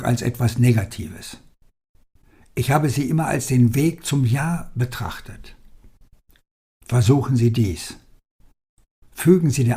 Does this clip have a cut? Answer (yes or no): no